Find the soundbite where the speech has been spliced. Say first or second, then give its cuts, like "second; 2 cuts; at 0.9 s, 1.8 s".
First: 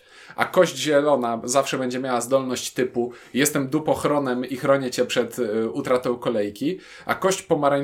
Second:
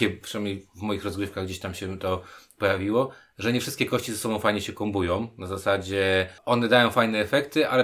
second; 1 cut; at 6.4 s